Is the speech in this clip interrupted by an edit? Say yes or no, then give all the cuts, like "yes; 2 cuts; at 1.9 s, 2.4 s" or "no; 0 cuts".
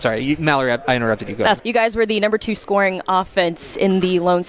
yes; 1 cut; at 1.6 s